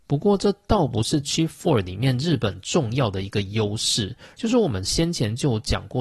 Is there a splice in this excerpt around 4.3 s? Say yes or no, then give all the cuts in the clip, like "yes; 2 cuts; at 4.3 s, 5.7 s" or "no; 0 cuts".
yes; 1 cut; at 4.3 s